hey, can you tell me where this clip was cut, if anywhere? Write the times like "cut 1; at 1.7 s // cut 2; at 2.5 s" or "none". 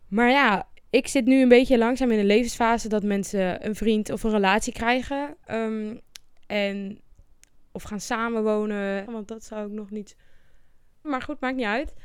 cut 1; at 9.1 s // cut 2; at 11.0 s

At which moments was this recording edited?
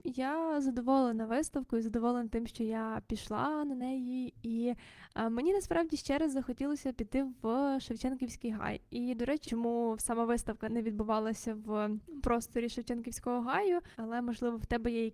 cut 1; at 9.4 s // cut 2; at 13.9 s

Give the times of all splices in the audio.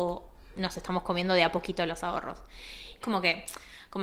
cut 1; at 3.0 s

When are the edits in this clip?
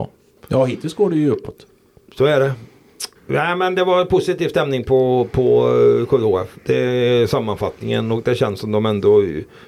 cut 1; at 3.2 s

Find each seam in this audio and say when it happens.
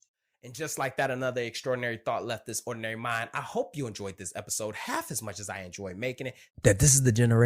cut 1; at 6.5 s

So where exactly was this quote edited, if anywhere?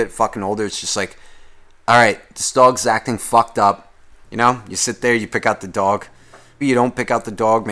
cut 1; at 4.2 s // cut 2; at 6.6 s

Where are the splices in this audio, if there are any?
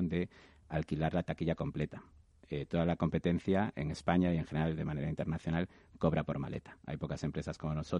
none

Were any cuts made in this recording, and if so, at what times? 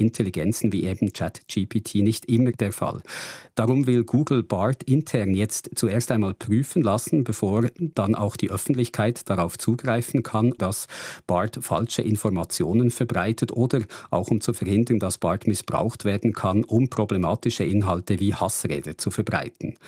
cut 1; at 10.6 s

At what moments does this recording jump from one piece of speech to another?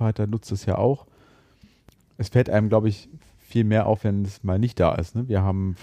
none

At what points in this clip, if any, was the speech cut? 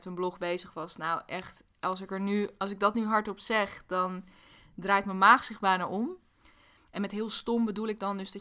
cut 1; at 6.8 s

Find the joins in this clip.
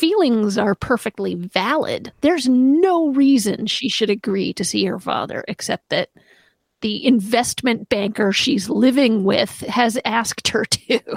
cut 1; at 2.1 s

